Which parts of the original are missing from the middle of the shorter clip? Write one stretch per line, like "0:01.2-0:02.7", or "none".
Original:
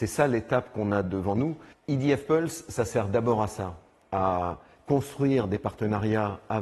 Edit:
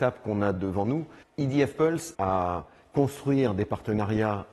0:02.6-0:04.1